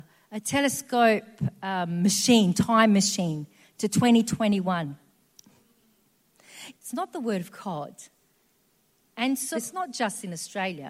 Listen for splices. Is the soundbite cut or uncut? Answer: cut